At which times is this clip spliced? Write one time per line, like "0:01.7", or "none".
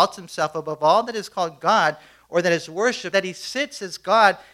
0:03.1